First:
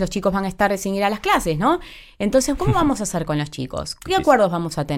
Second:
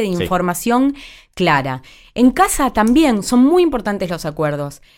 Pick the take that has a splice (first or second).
first